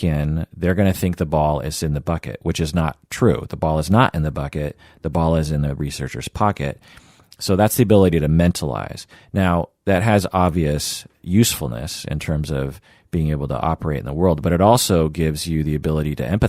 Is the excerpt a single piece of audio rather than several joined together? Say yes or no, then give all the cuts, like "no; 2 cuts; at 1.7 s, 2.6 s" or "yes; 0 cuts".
yes; 0 cuts